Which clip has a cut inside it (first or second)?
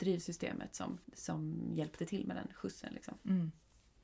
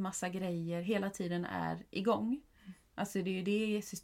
first